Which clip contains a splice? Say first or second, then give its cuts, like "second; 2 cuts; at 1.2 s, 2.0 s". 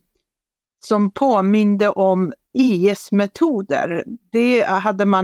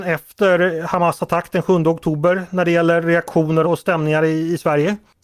second; 1 cut; at 3.6 s